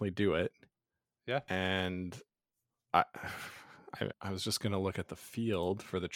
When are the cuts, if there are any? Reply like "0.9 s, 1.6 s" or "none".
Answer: 4.1 s